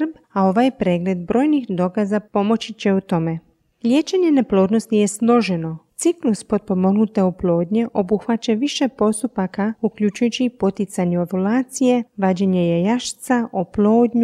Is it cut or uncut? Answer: cut